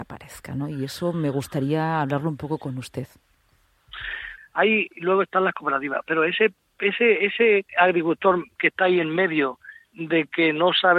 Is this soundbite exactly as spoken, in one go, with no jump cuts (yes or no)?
no